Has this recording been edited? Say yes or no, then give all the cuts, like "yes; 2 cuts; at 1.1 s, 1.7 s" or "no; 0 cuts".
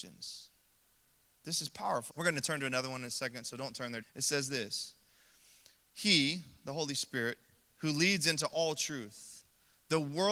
yes; 2 cuts; at 2.1 s, 4.0 s